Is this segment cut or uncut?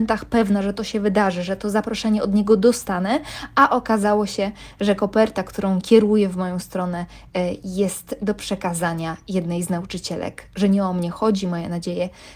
uncut